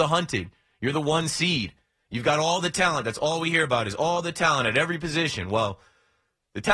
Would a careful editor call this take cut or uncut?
uncut